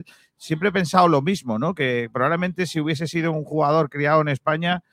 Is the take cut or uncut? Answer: uncut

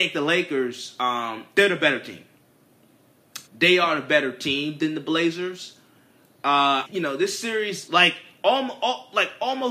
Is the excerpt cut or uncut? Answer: cut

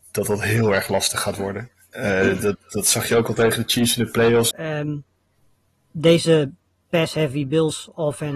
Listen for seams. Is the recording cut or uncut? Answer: cut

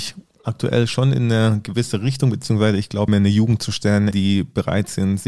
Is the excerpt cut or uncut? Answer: cut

